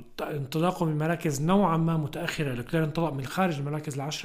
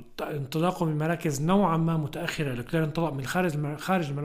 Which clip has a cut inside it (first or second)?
first